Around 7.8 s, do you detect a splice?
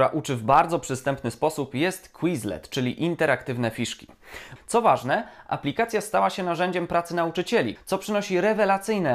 yes; 2 cuts; at 4.6 s, 7.8 s

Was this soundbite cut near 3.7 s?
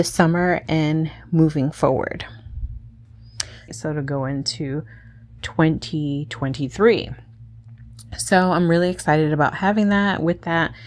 yes; 1 cut; at 3.7 s

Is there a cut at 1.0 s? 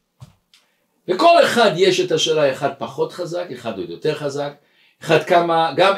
no; 0 cuts

